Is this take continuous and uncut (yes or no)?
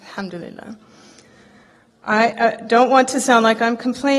yes